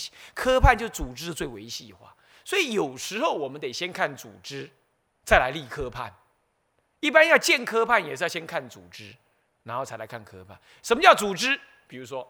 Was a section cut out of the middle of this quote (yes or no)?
no